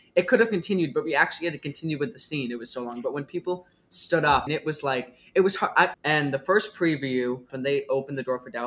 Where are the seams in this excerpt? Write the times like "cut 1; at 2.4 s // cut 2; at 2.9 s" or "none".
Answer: cut 1; at 4.5 s // cut 2; at 5.9 s // cut 3; at 7.5 s